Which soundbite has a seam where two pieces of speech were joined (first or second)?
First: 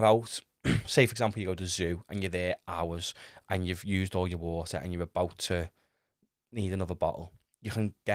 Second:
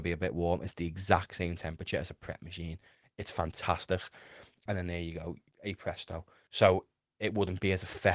second